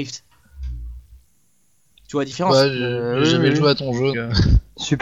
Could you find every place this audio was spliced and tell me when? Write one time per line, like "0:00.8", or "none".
0:04.1